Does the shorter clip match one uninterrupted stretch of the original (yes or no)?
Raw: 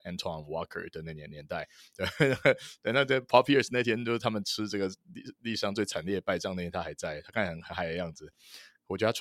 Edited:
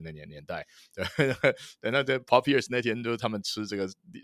yes